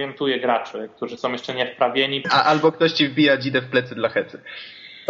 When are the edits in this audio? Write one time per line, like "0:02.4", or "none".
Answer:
0:02.2